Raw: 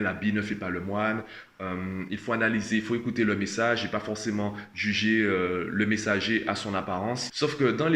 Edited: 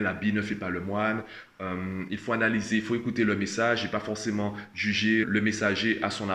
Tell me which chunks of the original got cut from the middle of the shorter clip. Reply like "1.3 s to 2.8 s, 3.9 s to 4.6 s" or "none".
5.2 s to 5.7 s